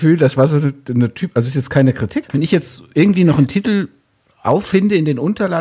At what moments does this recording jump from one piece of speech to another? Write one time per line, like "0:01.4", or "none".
0:02.2